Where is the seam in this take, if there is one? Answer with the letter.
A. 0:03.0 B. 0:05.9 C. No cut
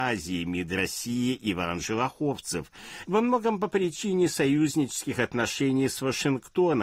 A